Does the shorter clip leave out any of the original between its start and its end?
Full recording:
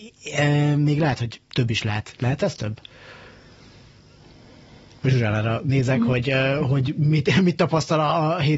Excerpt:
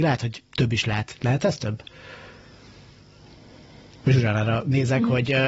no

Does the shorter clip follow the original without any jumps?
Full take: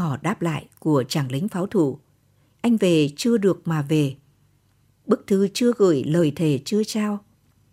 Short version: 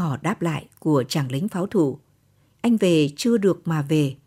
yes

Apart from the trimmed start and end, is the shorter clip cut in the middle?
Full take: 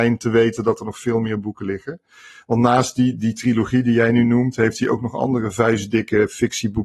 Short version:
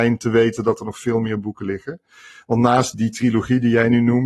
yes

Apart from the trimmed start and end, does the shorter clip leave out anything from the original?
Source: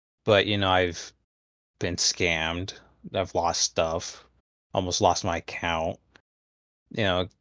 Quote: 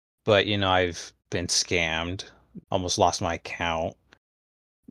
yes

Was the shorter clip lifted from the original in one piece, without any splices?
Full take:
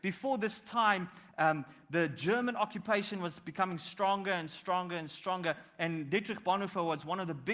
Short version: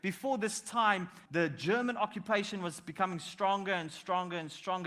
no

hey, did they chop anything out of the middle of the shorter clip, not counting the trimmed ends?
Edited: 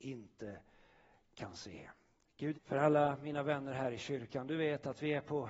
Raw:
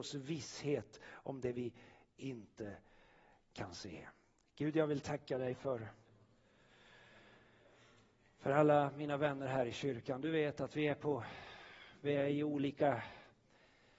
yes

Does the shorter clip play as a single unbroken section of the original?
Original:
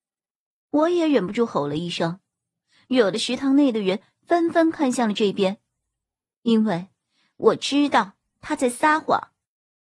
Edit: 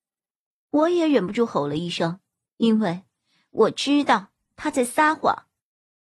no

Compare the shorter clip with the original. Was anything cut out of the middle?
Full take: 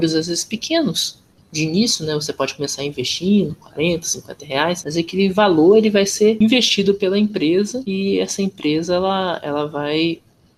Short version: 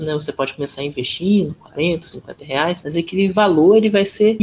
no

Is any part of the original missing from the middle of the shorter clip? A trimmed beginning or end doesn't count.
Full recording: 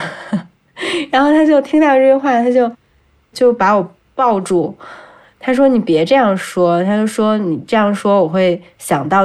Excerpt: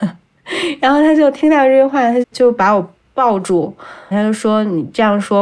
yes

